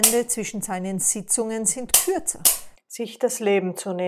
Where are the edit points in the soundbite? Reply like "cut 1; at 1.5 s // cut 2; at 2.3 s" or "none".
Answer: cut 1; at 2.7 s